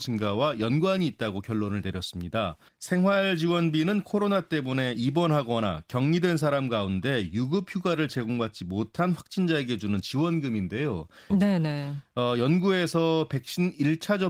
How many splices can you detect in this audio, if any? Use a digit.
2